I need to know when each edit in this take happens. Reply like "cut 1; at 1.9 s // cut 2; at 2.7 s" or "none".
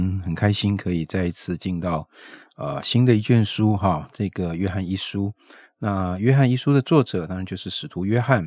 none